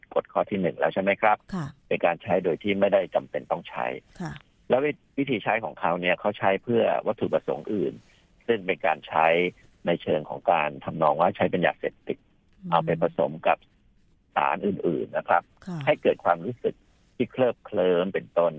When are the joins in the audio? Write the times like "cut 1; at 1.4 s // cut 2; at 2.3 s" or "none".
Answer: none

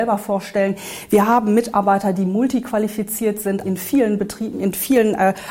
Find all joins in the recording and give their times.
cut 1; at 3.6 s

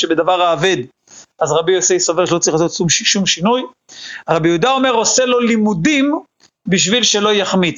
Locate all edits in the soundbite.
none

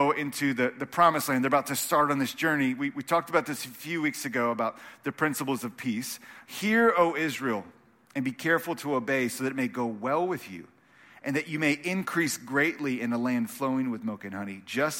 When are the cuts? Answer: cut 1; at 6.5 s

